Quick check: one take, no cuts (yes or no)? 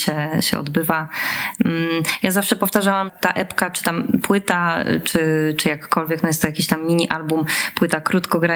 no